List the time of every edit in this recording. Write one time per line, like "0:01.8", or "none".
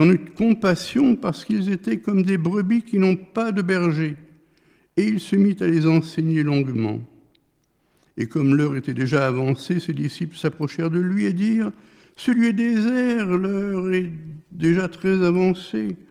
none